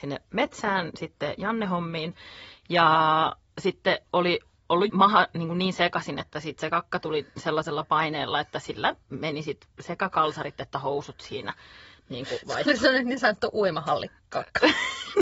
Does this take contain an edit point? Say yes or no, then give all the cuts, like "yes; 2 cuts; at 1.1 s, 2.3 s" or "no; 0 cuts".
yes; 1 cut; at 4.9 s